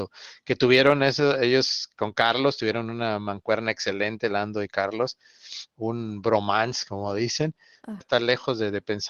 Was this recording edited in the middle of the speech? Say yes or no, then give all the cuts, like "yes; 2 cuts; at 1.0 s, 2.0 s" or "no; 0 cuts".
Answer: yes; 1 cut; at 8.0 s